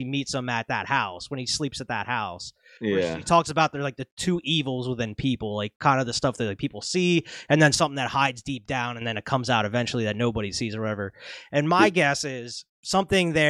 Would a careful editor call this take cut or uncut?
uncut